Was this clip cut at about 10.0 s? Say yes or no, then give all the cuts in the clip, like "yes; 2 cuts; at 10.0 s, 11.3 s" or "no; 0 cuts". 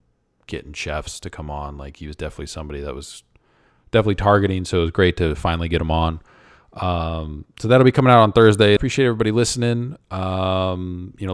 no; 1 cut; at 8.8 s